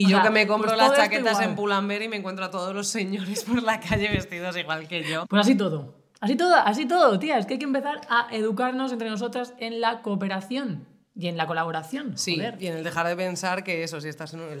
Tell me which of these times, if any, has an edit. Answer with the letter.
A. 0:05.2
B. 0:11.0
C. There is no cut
A